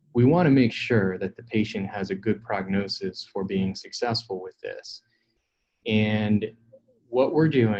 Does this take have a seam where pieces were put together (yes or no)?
no